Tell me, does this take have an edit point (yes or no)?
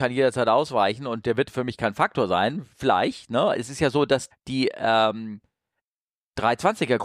yes